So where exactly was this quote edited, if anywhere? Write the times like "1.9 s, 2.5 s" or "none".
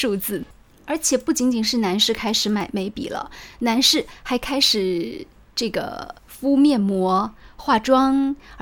6.2 s